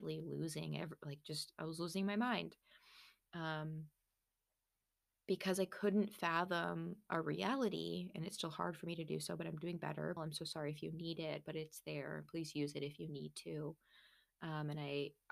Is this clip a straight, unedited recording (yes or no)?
no